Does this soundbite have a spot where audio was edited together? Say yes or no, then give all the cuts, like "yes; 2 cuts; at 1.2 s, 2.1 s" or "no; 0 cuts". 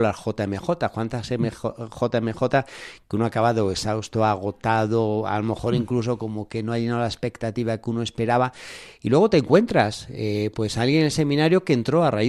no; 0 cuts